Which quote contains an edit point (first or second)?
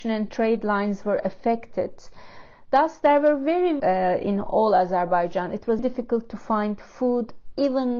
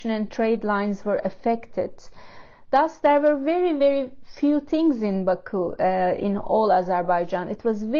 first